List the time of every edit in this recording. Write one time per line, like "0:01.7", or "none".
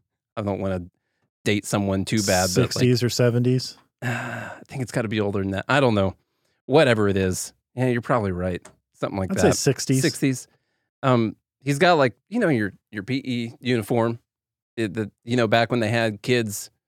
none